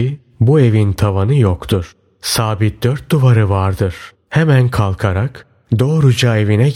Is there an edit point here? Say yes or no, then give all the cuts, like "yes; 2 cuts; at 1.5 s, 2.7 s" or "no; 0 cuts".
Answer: yes; 1 cut; at 4.1 s